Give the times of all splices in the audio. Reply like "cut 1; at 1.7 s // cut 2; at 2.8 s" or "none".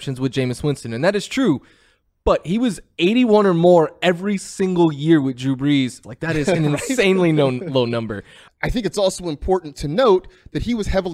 cut 1; at 6.0 s // cut 2; at 8.5 s